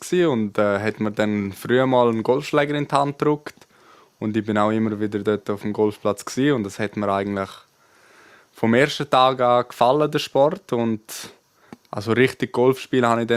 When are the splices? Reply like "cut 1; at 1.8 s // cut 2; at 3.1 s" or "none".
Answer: none